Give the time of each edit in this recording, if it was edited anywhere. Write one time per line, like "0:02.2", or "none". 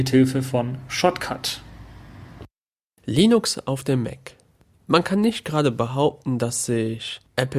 none